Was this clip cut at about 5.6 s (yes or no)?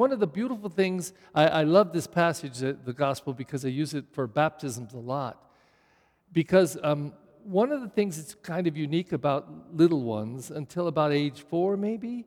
no